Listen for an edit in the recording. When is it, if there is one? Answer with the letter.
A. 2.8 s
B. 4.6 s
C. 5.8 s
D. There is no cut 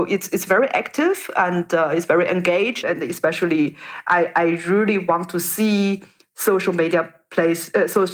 A